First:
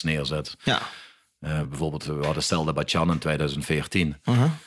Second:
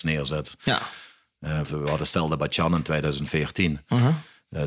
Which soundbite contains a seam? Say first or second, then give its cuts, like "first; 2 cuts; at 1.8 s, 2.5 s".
second; 1 cut; at 1.6 s